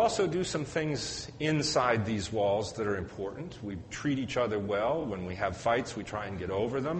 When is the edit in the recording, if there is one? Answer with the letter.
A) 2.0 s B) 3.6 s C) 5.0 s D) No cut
D